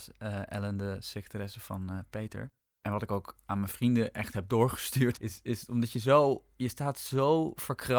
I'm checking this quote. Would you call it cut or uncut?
cut